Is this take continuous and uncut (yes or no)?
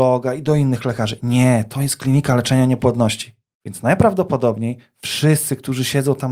yes